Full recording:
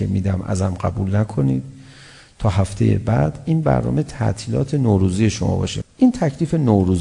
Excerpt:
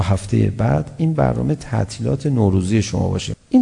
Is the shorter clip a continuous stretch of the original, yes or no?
yes